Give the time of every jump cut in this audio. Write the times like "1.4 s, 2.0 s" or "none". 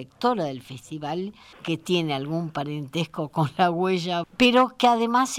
1.5 s, 4.2 s